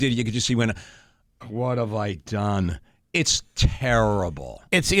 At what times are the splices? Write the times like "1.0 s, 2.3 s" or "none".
1.4 s